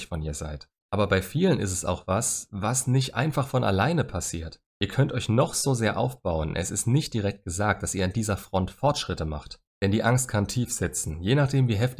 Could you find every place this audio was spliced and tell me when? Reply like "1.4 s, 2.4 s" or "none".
none